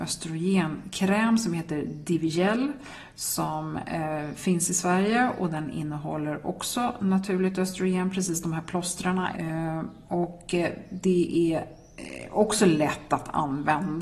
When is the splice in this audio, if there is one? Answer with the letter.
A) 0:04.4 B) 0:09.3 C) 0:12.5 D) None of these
B